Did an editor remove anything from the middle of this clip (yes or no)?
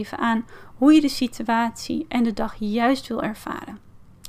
no